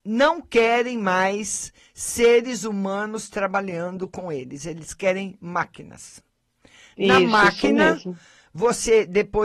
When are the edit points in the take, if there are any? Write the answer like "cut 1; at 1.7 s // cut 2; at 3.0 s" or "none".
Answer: none